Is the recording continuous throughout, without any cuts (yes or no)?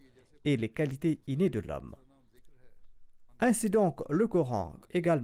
no